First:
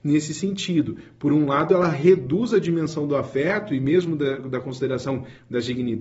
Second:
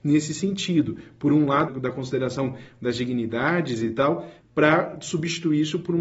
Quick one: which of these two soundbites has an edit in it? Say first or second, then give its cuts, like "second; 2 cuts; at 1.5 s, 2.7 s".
second; 2 cuts; at 1.7 s, 4.4 s